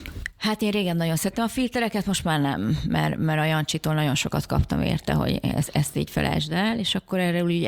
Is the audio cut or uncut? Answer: uncut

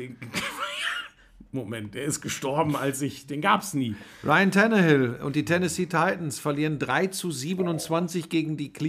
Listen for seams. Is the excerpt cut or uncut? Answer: uncut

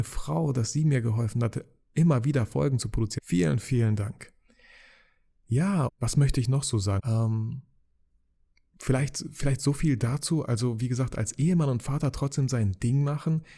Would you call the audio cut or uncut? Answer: cut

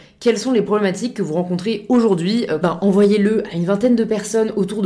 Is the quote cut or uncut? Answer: cut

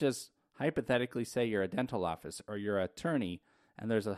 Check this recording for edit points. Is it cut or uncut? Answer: uncut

